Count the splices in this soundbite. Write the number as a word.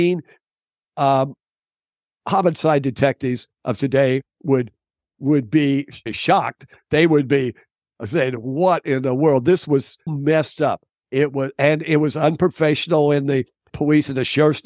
one